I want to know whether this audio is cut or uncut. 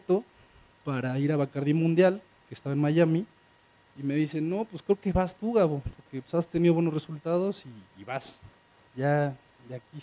cut